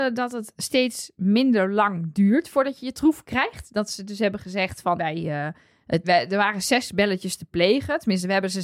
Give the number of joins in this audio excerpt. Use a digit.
2